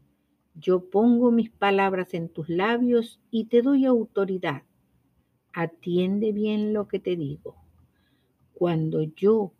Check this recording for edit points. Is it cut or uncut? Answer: uncut